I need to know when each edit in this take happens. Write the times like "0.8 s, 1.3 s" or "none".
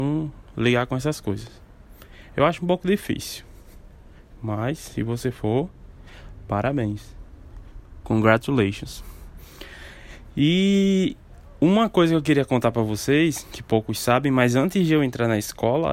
none